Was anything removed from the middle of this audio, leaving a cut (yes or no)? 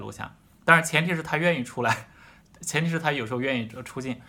no